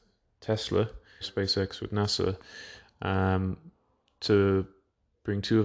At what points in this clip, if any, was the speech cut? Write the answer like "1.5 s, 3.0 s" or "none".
1.2 s